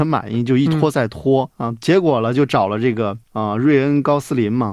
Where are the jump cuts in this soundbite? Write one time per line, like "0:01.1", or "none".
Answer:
0:01.5
0:03.2